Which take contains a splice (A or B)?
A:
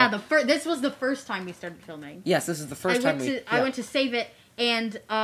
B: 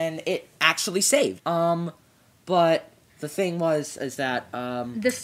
B